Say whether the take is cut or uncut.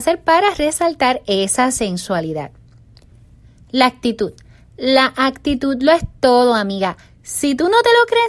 uncut